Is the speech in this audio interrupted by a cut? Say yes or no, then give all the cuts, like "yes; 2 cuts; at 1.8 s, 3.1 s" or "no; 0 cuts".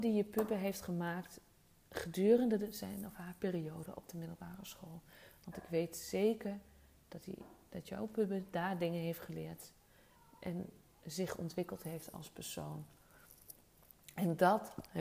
no; 0 cuts